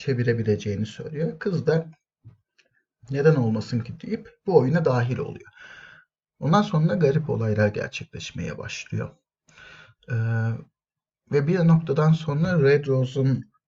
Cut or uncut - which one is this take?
uncut